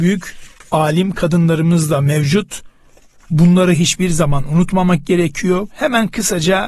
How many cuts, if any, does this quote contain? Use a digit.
1